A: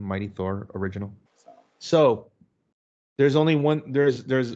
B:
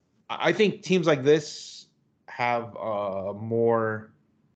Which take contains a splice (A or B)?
A